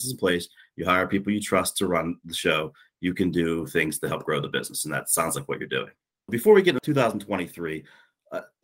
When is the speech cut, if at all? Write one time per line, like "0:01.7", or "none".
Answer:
none